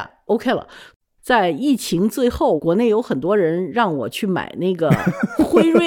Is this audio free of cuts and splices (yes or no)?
no